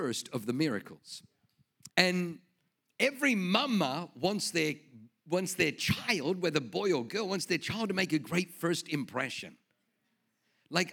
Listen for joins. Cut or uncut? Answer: cut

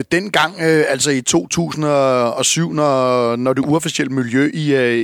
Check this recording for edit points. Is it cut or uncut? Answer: uncut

